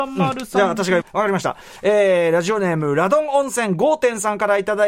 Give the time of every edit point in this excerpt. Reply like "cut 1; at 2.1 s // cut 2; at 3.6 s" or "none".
cut 1; at 1.0 s